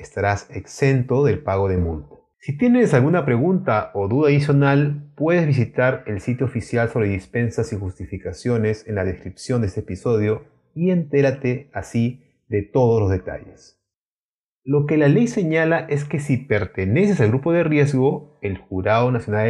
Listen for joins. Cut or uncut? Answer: cut